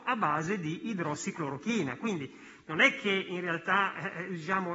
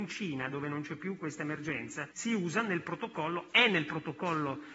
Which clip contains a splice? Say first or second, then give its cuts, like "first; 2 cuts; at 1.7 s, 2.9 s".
second; 1 cut; at 2.1 s